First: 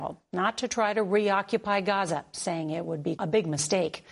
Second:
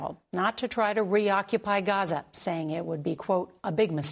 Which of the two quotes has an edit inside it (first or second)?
first